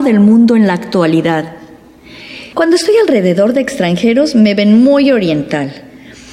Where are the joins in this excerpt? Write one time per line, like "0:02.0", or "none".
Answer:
0:02.5